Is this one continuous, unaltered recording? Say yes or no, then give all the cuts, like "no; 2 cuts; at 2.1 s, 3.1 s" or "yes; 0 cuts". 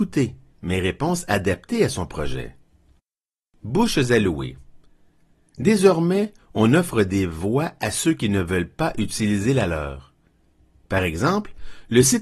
yes; 0 cuts